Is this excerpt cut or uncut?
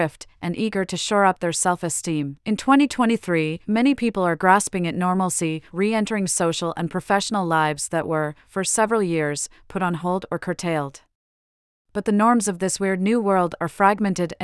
cut